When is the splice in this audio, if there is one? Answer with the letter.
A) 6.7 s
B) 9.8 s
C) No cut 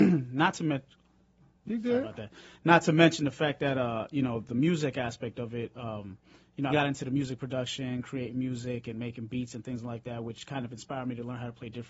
A